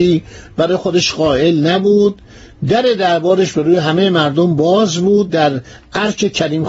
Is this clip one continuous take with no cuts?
yes; 0 cuts

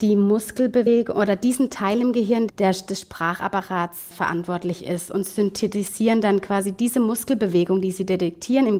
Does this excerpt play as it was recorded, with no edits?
no; 2 cuts; at 2.5 s, 4.1 s

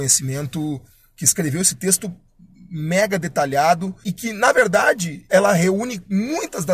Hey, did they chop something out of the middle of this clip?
yes; 2 cuts; at 4.0 s, 5.3 s

